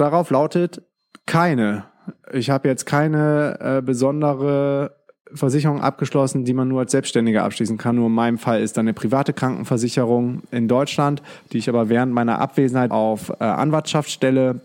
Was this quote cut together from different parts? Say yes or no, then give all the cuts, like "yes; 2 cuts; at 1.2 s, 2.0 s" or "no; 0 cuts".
yes; 2 cuts; at 7.9 s, 12.9 s